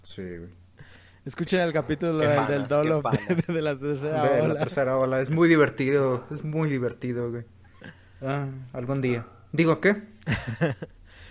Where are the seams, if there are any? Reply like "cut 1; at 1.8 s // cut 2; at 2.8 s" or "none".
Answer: none